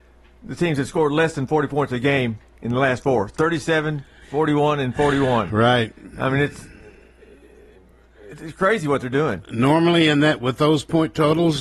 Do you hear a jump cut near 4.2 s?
yes; 1 cut; at 4.2 s

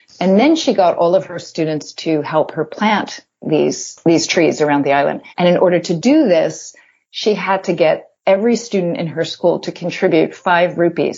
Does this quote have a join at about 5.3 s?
yes; 1 cut; at 5.3 s

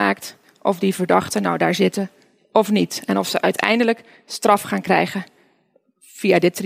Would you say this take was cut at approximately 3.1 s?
no; 0 cuts

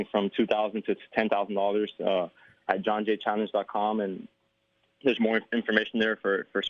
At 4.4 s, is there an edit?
no; 0 cuts

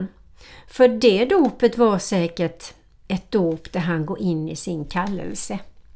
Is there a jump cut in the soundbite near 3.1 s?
yes; 1 cut; at 3.1 s

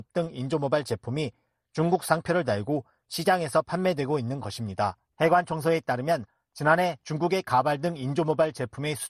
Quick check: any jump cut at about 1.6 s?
no; 1 cut; at 5.1 s

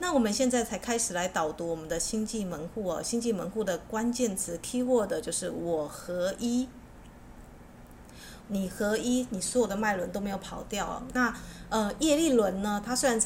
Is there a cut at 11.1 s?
no; 1 cut; at 8.4 s

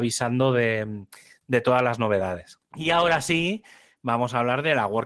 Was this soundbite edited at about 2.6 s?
yes; 1 cut; at 2.6 s

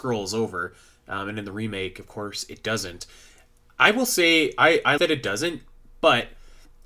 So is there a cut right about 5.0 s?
yes; 1 cut; at 5.0 s

